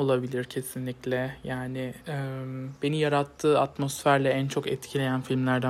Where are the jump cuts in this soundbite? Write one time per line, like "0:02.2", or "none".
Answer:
none

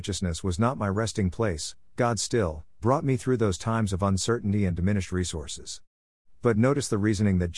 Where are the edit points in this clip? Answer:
0:02.8

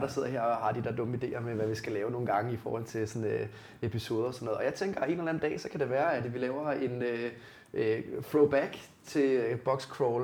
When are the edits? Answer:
none

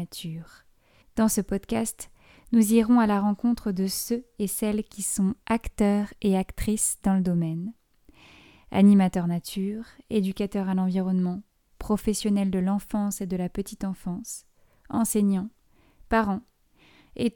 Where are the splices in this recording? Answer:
0:01.0

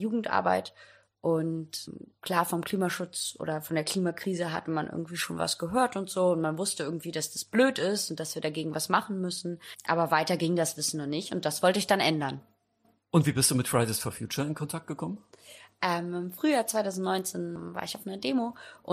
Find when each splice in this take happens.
0:13.0

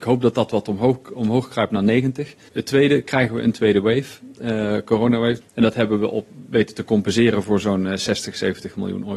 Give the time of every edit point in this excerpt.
0:02.5
0:05.4

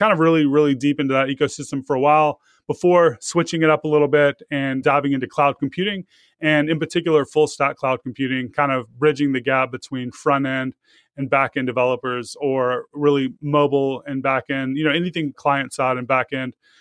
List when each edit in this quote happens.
none

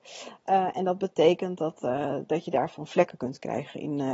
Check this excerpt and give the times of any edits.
none

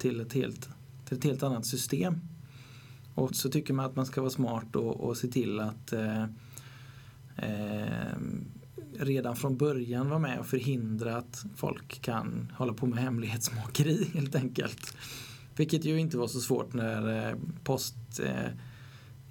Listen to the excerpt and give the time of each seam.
0:03.3

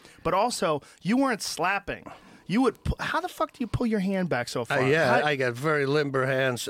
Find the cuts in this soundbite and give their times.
none

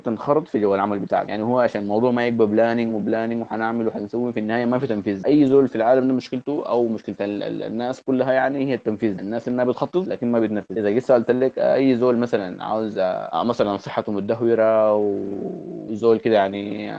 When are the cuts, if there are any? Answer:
0:02.9

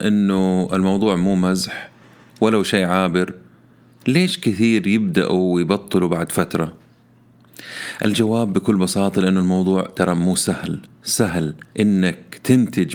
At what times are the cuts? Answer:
0:11.7

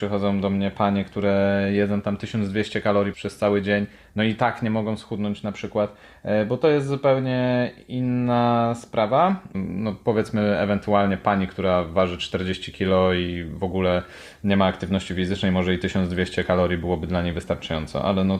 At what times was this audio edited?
0:03.1
0:09.5

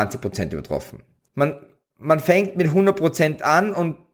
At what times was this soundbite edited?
0:01.3

